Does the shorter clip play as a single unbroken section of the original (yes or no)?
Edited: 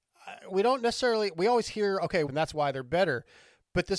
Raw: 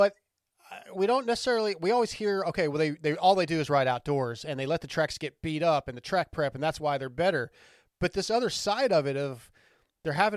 no